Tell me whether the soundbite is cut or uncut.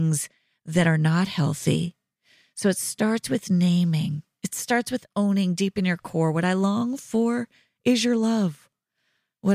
uncut